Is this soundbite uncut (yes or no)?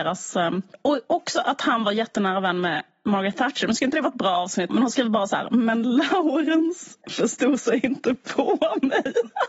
no